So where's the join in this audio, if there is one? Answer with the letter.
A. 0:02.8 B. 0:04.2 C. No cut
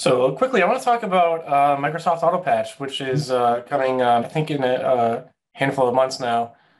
B